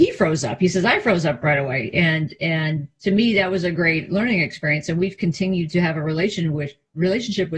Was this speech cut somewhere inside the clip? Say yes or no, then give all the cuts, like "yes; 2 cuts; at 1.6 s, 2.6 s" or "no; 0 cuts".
no; 0 cuts